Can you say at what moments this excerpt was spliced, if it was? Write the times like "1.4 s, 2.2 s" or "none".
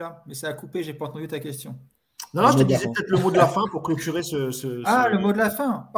none